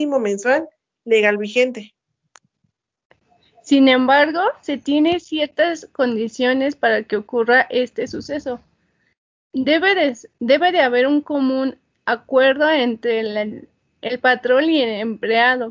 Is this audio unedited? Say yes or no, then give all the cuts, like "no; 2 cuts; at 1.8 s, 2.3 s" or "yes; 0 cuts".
yes; 0 cuts